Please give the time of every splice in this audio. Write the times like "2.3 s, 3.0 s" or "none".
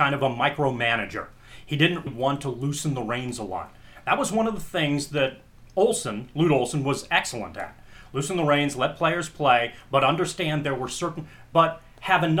2.1 s